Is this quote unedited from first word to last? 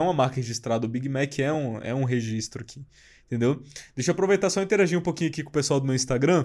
yes; 0 cuts

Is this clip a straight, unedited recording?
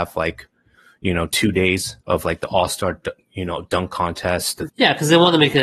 no; 2 cuts; at 2.0 s, 4.7 s

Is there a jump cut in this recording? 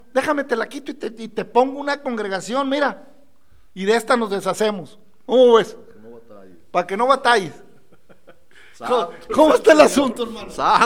no; 0 cuts

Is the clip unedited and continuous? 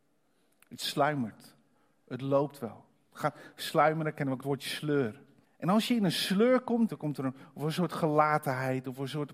no; 2 cuts; at 5.4 s, 6.9 s

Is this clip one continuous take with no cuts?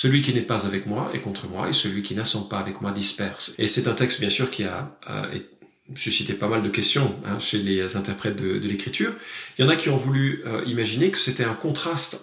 no; 1 cut; at 3.5 s

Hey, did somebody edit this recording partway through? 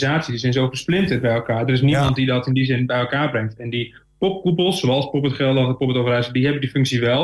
no; 0 cuts

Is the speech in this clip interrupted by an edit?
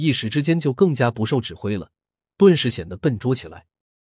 no; 0 cuts

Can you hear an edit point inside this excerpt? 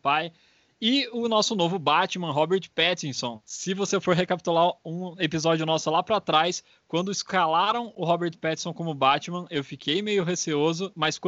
no; 0 cuts

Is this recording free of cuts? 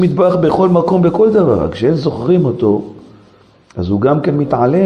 yes; 0 cuts

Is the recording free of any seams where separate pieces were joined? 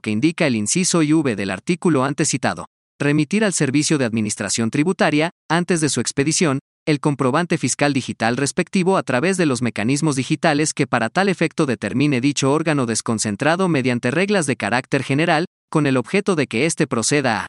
yes; 0 cuts

